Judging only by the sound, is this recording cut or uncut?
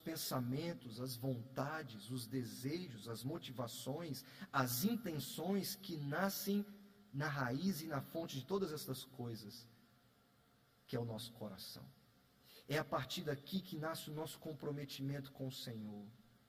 uncut